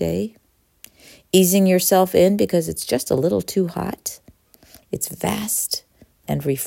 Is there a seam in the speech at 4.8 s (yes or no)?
yes